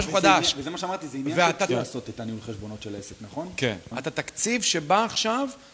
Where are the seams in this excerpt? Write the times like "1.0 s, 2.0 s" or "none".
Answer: 1.7 s, 3.9 s